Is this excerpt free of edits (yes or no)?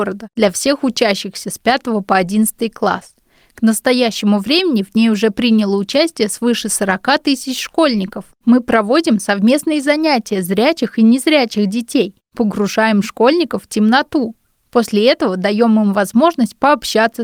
yes